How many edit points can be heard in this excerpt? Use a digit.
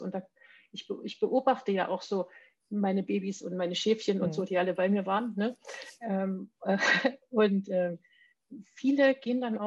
0